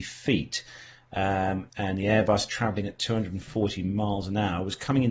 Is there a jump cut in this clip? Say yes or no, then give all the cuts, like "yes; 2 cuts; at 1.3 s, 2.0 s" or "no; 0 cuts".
yes; 1 cut; at 1.7 s